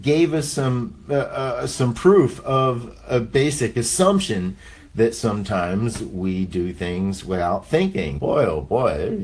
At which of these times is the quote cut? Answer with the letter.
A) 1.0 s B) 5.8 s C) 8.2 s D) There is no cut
C